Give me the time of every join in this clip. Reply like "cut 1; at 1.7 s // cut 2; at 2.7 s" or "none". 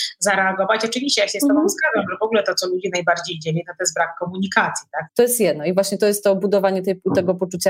cut 1; at 5.1 s